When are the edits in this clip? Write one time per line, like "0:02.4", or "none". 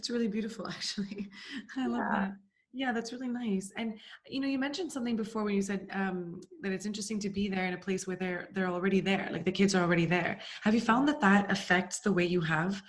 none